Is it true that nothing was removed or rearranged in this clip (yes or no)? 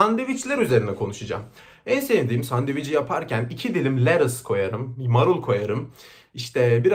yes